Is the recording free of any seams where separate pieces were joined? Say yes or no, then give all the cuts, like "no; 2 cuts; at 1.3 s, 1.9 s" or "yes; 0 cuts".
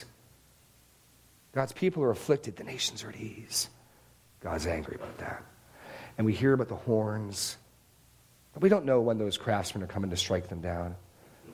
yes; 0 cuts